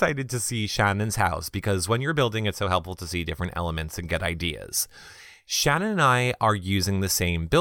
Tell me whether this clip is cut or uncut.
uncut